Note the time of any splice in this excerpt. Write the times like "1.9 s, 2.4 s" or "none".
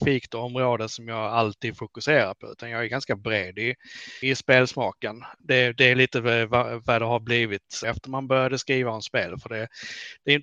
4.2 s